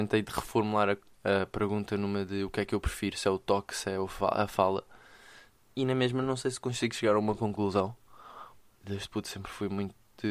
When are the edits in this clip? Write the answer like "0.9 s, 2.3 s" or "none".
8.8 s